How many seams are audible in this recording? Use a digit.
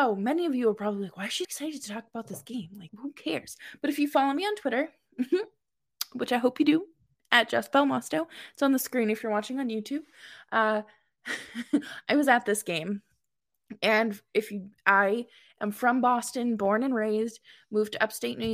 2